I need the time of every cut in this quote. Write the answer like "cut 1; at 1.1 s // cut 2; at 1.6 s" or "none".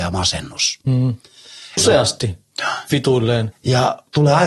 cut 1; at 1.8 s // cut 2; at 3.5 s